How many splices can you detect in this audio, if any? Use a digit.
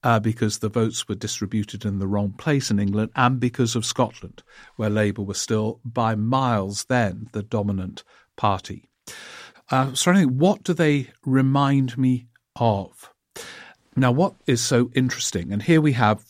2